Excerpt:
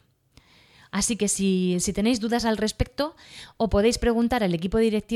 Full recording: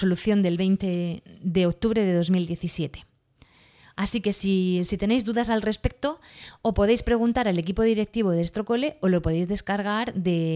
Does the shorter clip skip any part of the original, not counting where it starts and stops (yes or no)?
no